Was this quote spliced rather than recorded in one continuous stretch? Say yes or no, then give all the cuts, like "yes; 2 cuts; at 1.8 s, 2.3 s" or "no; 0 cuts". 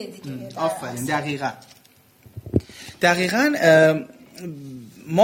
no; 0 cuts